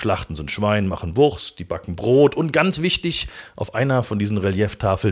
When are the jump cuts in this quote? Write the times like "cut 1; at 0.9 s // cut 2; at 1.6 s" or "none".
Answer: none